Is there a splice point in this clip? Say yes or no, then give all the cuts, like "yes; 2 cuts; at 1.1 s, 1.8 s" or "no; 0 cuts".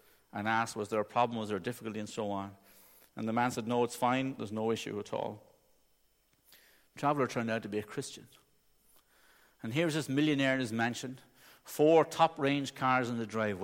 yes; 1 cut; at 4.4 s